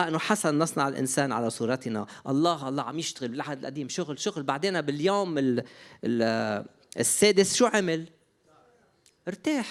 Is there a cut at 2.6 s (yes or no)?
yes